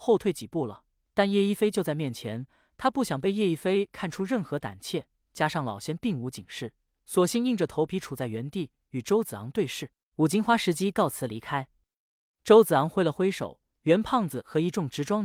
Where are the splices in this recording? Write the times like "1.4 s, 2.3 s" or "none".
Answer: 10.1 s